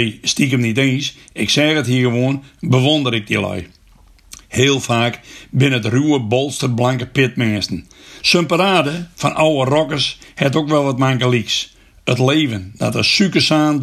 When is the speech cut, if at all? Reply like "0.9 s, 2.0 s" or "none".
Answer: 8.2 s